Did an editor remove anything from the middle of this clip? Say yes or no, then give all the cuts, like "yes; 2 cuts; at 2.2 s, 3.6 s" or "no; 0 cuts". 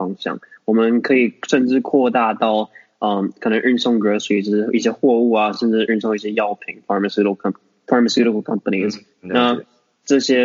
no; 0 cuts